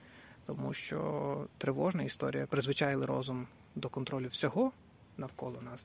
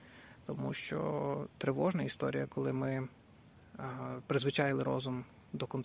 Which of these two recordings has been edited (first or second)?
first